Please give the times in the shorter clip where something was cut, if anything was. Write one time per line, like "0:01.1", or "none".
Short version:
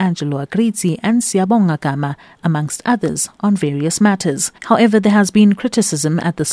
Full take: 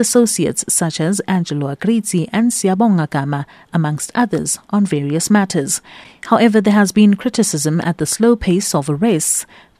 0:04.6